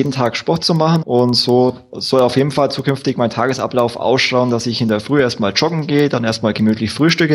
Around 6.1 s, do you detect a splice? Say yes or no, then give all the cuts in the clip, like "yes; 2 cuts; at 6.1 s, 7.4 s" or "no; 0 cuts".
no; 1 cut; at 1.0 s